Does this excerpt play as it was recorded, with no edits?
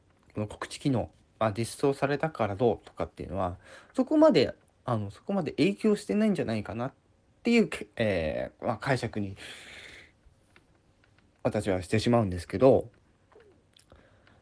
yes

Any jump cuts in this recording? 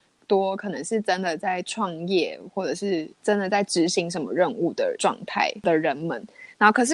yes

